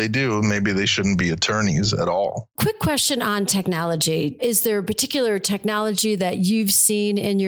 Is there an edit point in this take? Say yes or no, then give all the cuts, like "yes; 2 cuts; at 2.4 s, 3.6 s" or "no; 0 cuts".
yes; 1 cut; at 2.6 s